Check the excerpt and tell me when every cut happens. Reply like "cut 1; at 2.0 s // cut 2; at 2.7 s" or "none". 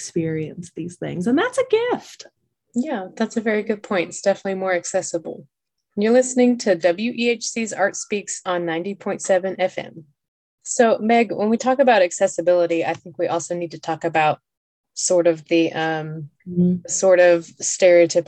cut 1; at 16.4 s